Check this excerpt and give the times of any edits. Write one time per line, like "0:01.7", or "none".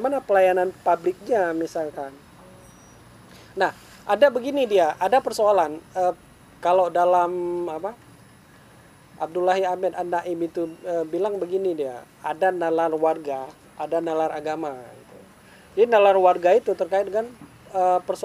none